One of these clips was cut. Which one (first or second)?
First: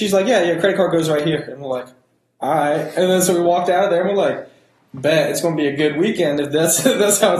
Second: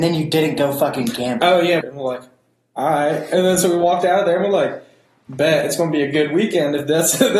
second